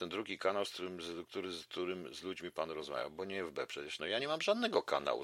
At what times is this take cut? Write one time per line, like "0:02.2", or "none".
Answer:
0:04.0